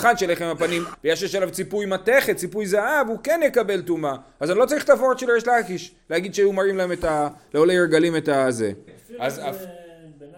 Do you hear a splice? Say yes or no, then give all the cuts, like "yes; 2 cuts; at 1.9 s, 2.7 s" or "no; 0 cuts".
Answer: yes; 2 cuts; at 0.9 s, 8.9 s